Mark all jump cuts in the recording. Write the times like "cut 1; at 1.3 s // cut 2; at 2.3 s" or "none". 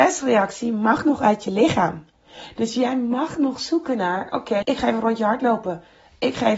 cut 1; at 4.6 s